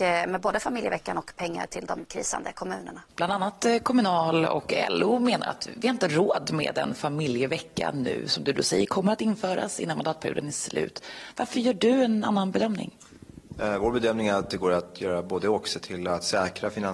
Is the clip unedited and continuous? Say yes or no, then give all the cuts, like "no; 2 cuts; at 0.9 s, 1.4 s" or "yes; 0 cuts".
no; 1 cut; at 3.1 s